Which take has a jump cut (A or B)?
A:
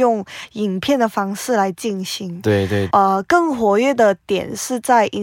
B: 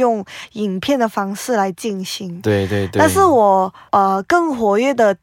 A